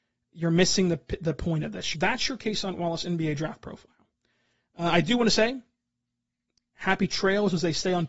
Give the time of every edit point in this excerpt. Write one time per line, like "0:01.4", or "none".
0:01.9